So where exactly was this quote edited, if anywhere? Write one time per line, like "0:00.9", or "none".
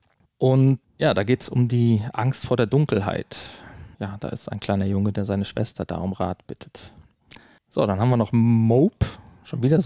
0:03.9